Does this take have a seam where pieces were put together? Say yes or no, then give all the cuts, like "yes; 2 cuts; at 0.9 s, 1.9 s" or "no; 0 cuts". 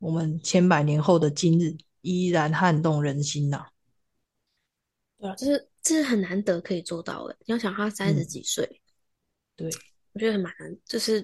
no; 0 cuts